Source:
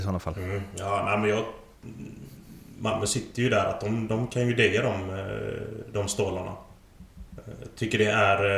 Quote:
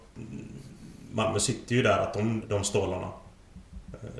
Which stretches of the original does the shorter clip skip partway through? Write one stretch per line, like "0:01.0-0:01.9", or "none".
0:04.1-0:05.8